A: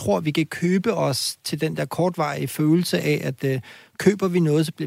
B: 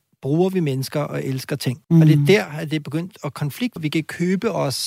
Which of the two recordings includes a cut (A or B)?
B